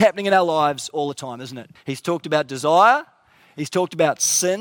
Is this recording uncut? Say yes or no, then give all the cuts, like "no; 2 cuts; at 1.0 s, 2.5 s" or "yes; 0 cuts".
no; 1 cut; at 1.8 s